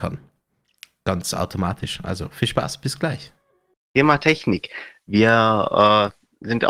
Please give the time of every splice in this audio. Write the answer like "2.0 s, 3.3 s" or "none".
3.7 s